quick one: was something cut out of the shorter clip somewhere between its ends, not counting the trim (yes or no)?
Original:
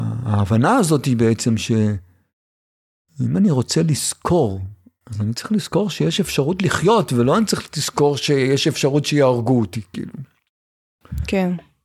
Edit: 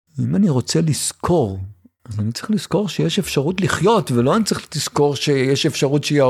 no